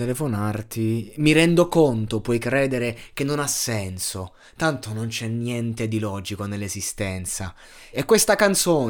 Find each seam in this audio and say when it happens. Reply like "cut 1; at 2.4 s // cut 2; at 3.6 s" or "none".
cut 1; at 7.9 s

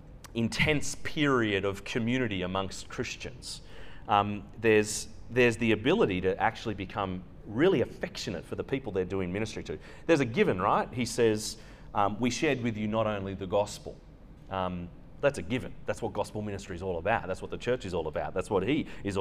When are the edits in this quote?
none

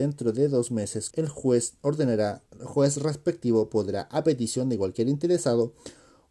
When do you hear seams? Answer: cut 1; at 1.1 s // cut 2; at 2.5 s

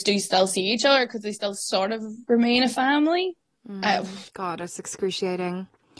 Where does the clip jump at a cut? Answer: cut 1; at 4.3 s

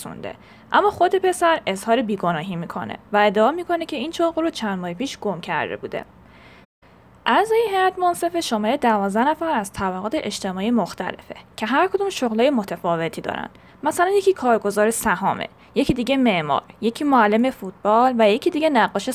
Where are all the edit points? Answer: none

